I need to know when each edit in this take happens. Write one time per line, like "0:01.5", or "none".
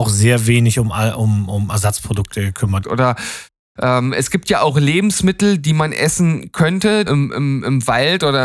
0:02.8
0:07.1